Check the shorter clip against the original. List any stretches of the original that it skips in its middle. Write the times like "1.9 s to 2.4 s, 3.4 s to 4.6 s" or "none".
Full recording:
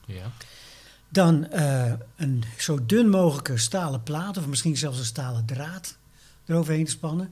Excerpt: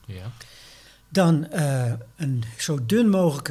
none